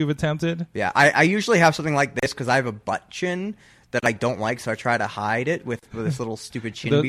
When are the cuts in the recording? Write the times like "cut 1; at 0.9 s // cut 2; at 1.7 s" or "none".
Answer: cut 1; at 5.9 s